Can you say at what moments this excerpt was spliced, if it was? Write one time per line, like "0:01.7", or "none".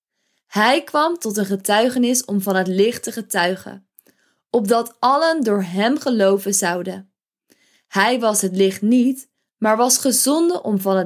none